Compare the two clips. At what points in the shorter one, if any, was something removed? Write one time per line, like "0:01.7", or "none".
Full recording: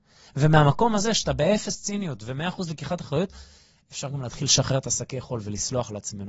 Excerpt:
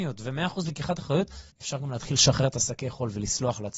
0:01.5